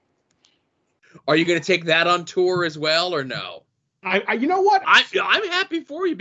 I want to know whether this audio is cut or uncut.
cut